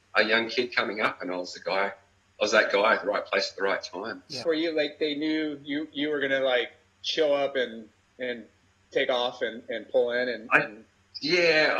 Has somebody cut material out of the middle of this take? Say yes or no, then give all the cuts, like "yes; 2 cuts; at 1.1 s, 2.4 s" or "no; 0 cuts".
yes; 1 cut; at 4.4 s